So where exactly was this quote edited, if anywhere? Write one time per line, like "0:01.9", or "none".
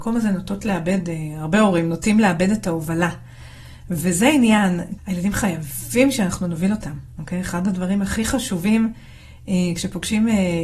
0:05.0

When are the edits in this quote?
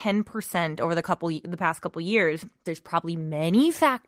0:02.7

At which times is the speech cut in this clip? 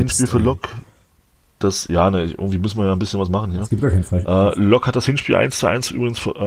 none

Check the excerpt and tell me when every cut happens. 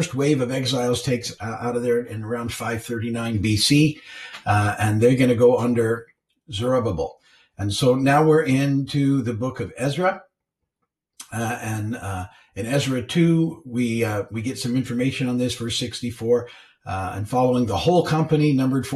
none

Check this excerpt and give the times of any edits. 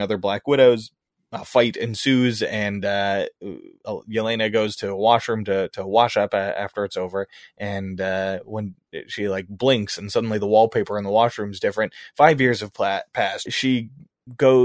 0:13.5

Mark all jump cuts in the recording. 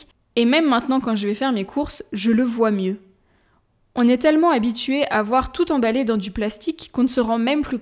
none

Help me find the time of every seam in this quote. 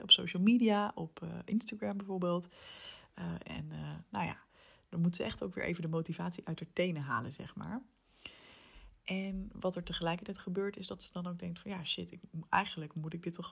0:03.4

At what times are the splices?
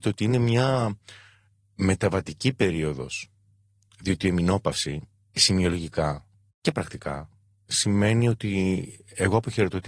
none

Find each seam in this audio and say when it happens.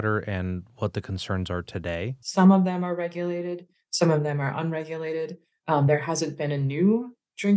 0:02.2

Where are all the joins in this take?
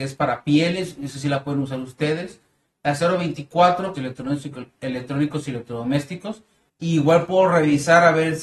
0:03.9
0:06.7

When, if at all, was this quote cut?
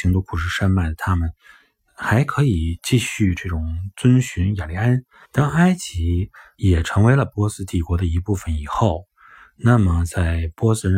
0:05.2

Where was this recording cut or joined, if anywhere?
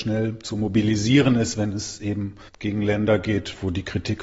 none

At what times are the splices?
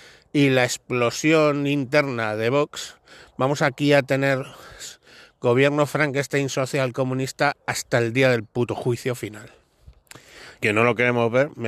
0:10.6

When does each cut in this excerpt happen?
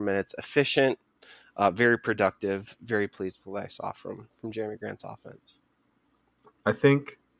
none

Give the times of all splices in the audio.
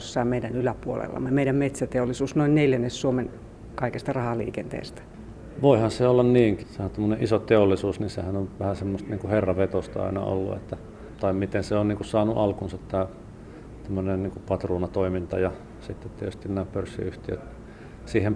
0:06.6

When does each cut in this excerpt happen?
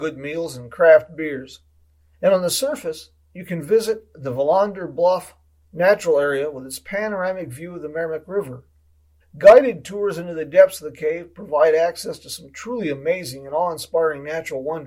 0:02.1
0:09.2

